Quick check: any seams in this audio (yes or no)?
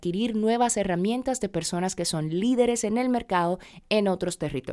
no